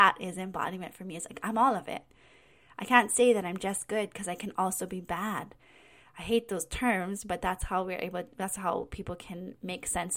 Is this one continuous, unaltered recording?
yes; 0 cuts

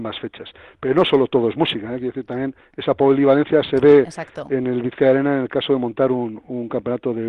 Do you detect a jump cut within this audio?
no; 0 cuts

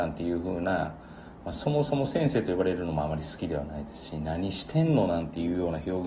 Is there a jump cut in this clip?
no; 0 cuts

